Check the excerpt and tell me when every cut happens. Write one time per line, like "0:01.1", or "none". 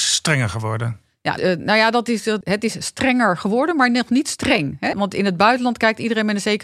0:01.4
0:02.4
0:04.9